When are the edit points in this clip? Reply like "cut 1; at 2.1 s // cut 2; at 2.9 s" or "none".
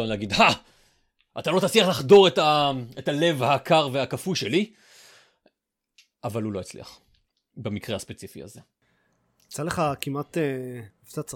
none